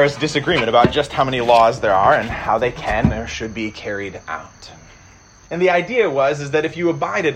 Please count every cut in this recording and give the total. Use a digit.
1